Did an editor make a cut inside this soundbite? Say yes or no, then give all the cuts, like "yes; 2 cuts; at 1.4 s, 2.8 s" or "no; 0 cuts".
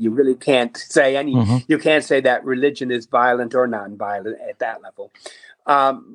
no; 0 cuts